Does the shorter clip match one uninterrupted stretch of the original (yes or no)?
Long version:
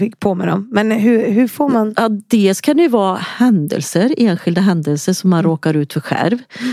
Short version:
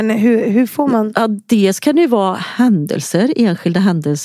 yes